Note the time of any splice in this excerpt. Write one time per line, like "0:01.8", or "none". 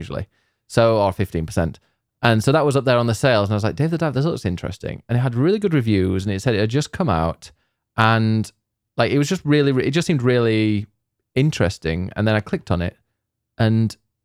none